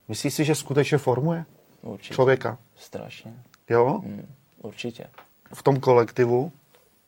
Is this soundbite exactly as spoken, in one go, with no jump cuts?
no; 1 cut; at 5.5 s

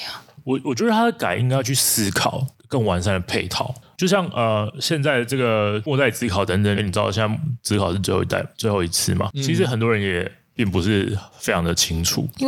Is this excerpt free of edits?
no; 2 cuts; at 3.9 s, 6.8 s

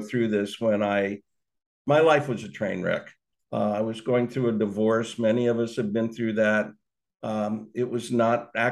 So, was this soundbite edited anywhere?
yes; 1 cut; at 3.3 s

